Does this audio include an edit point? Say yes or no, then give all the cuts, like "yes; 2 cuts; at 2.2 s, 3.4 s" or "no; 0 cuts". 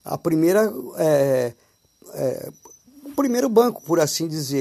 no; 0 cuts